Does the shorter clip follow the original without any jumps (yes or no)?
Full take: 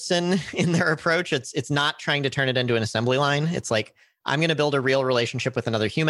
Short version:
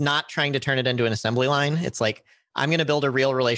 yes